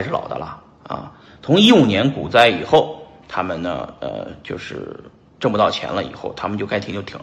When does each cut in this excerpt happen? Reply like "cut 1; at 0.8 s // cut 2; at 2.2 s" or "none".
none